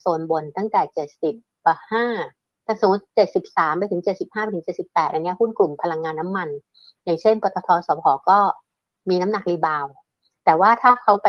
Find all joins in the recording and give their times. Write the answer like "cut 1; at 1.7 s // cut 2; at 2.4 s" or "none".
none